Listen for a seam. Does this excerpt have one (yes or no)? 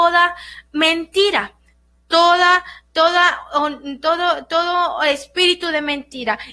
no